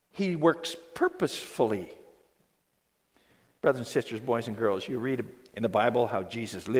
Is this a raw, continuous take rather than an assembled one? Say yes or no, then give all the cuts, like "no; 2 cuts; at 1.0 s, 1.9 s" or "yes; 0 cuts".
no; 1 cut; at 3.6 s